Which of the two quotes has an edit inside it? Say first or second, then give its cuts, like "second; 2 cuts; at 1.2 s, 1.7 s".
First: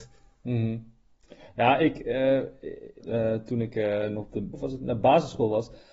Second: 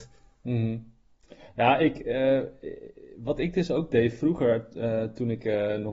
first; 2 cuts; at 3.0 s, 4.5 s